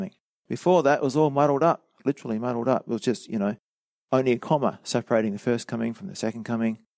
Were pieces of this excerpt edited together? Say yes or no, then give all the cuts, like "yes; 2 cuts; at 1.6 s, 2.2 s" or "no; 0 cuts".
no; 0 cuts